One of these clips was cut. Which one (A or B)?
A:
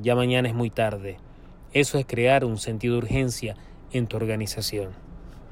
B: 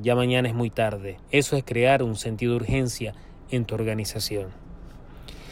B